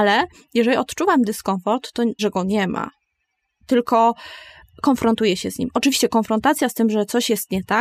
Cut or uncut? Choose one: cut